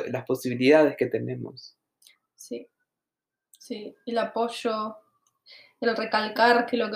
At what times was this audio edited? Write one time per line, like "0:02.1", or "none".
none

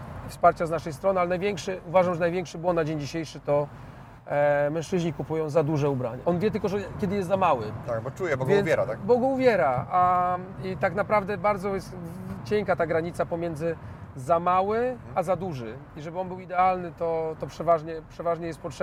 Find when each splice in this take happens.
0:06.2

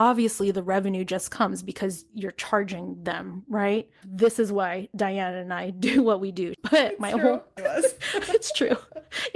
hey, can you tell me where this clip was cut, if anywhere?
0:04.0
0:06.5
0:07.6

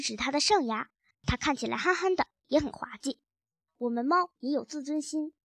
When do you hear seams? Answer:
0:01.1
0:03.7

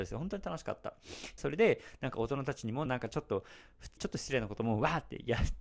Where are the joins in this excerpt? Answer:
0:01.4
0:02.9
0:04.0

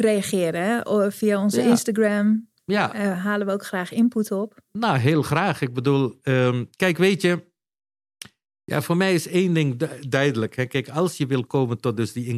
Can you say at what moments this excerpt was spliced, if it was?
none

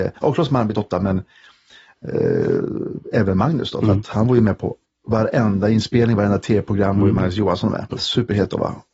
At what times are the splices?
0:07.9

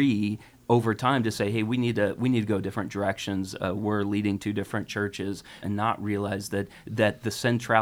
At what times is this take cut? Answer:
0:05.6

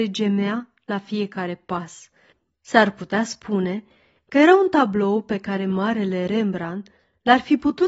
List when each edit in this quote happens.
0:02.5

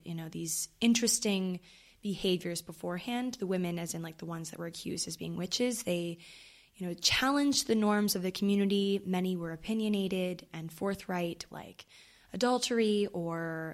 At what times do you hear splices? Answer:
0:11.5

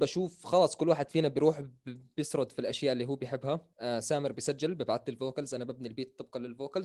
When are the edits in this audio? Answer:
0:03.7

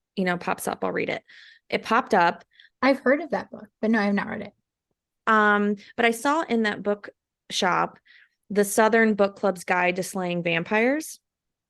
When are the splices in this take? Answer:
0:02.7
0:05.2

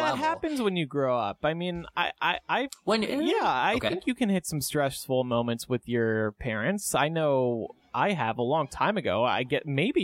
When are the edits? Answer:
none

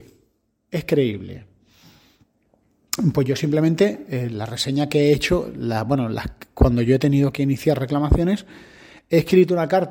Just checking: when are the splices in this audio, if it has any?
none

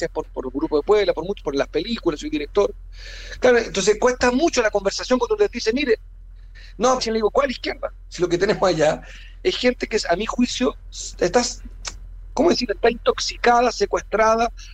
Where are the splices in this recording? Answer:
0:07.0

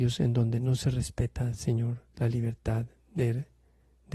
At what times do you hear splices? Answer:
none

